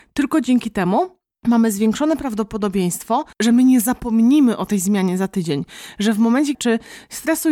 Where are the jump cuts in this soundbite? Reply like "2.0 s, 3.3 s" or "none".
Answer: 3.3 s, 6.5 s